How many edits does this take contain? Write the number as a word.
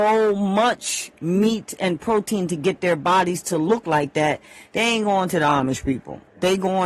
zero